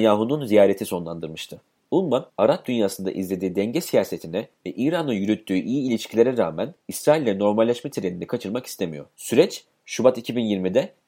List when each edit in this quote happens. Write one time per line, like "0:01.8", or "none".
0:09.1